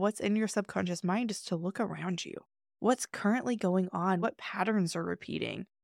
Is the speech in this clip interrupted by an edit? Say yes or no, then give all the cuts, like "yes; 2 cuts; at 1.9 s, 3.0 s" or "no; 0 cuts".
no; 0 cuts